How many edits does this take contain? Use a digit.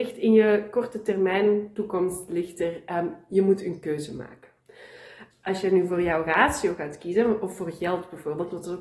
1